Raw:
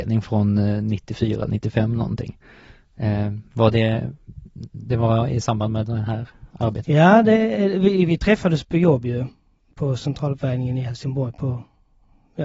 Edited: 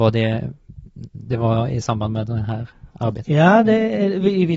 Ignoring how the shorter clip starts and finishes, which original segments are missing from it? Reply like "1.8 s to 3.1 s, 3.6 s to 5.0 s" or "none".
none